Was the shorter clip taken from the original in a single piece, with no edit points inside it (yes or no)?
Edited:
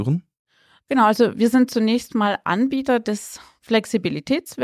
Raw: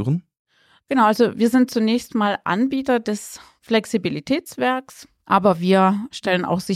yes